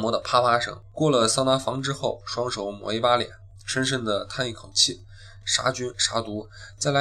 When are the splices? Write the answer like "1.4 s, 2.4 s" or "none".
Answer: 0.9 s, 5.4 s